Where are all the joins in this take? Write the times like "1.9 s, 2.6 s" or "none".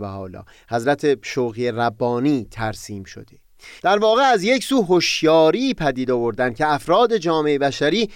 3.8 s